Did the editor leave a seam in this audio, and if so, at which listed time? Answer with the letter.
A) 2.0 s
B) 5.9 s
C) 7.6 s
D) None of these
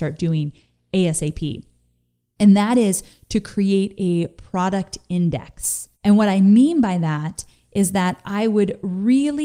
B